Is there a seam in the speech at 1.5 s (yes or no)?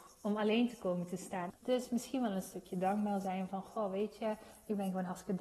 yes